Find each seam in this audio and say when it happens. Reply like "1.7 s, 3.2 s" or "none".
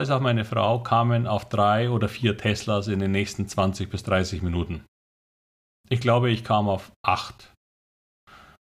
none